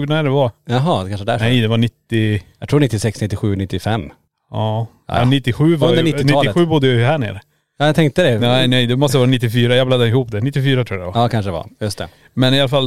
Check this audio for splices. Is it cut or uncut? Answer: uncut